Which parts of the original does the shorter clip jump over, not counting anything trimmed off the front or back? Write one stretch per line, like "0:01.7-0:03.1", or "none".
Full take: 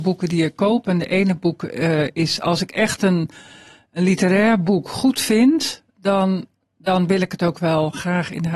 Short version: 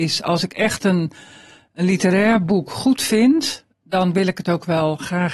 0:05.9-0:06.7